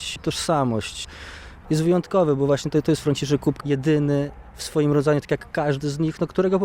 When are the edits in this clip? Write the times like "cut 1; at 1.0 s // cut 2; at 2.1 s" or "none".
cut 1; at 1.6 s // cut 2; at 3.6 s